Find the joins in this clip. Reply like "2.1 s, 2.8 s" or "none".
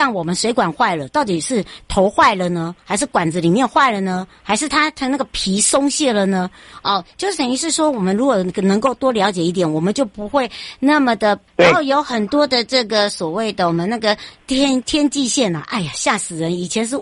11.5 s, 14.8 s